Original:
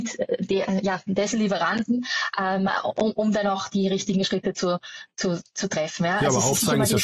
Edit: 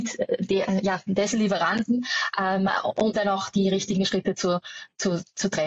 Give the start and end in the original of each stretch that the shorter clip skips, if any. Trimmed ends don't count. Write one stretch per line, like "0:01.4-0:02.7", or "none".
0:03.1-0:03.3